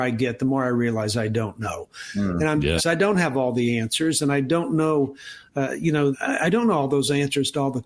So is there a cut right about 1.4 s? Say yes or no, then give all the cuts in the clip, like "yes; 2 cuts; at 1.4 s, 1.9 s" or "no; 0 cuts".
no; 2 cuts; at 2.8 s, 6.1 s